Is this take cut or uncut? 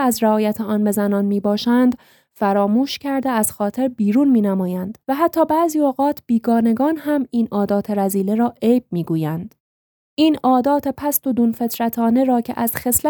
cut